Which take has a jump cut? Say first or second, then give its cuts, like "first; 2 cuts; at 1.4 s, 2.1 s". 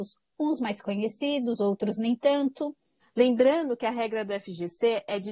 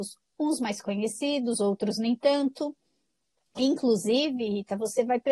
first; 1 cut; at 3.0 s